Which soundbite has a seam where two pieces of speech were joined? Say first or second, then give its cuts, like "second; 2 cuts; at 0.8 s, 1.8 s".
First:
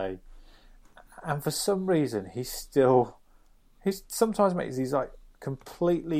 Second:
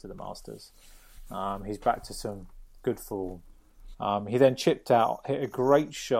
second; 1 cut; at 3.9 s